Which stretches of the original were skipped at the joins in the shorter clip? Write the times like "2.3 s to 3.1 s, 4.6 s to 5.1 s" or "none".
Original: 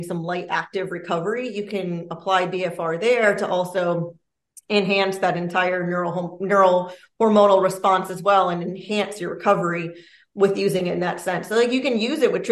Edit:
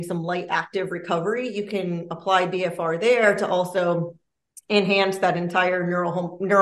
none